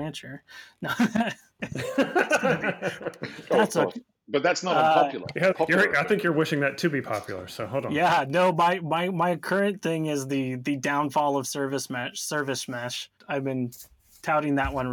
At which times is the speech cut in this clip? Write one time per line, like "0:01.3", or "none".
0:05.5
0:13.2